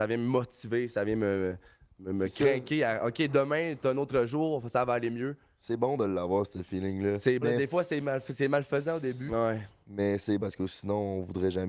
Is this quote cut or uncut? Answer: cut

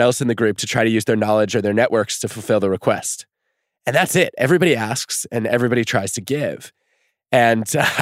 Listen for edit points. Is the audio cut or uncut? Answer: uncut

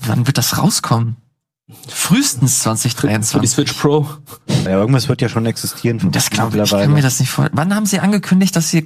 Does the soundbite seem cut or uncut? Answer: cut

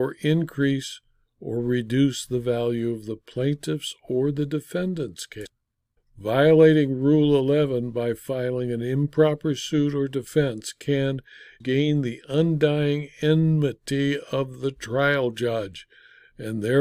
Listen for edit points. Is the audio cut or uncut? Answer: cut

